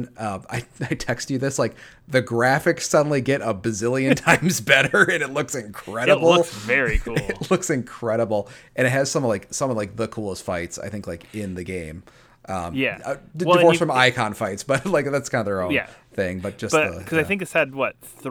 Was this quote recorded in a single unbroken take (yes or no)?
yes